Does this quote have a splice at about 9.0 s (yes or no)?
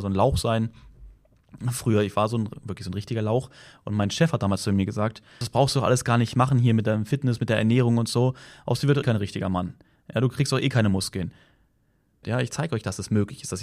yes